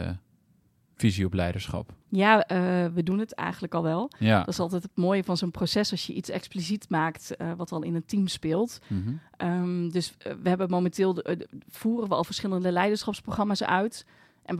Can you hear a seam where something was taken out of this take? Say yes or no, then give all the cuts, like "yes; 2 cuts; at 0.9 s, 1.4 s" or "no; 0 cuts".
yes; 1 cut; at 2.0 s